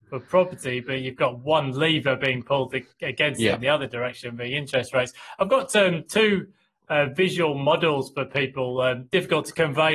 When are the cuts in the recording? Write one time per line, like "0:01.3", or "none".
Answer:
none